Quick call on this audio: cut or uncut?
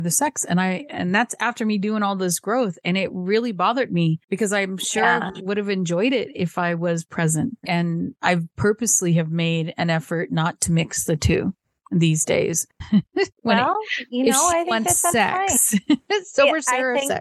cut